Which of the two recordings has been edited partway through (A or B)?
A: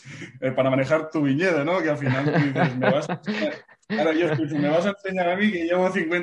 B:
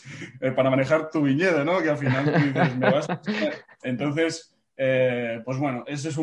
B